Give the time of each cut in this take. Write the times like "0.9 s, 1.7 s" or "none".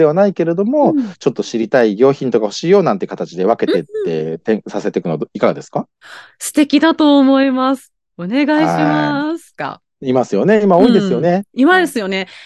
9.6 s